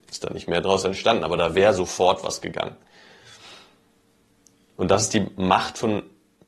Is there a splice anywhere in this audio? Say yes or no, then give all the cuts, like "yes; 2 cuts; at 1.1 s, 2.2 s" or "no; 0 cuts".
no; 0 cuts